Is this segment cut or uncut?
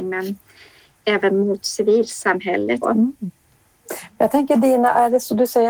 cut